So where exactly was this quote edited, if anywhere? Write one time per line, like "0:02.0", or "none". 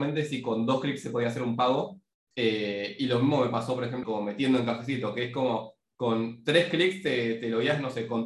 0:02.1
0:04.0